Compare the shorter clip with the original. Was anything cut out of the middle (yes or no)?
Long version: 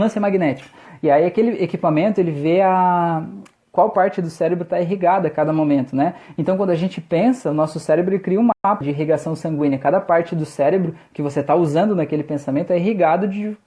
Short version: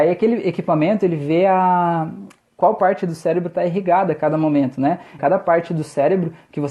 yes